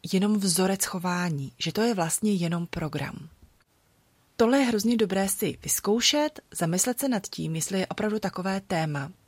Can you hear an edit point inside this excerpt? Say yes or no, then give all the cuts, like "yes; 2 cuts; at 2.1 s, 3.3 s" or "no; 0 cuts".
yes; 1 cut; at 4.3 s